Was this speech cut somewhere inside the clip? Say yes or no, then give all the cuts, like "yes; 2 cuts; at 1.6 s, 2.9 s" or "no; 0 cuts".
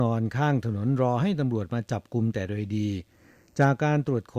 no; 0 cuts